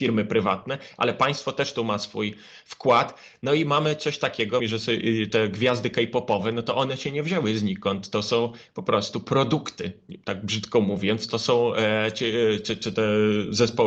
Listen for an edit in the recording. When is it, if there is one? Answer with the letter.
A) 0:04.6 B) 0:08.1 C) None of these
A